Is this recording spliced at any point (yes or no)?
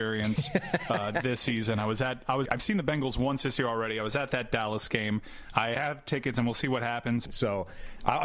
yes